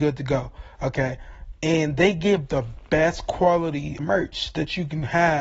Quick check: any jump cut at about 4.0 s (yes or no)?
yes